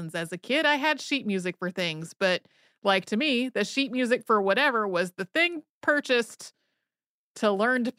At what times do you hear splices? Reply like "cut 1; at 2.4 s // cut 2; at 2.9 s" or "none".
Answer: none